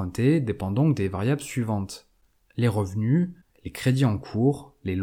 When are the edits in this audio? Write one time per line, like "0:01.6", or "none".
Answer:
0:03.5